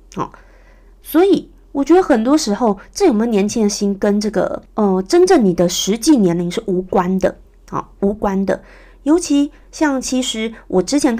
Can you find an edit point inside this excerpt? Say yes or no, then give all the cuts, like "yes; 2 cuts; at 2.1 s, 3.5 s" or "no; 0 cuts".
yes; 1 cut; at 4.7 s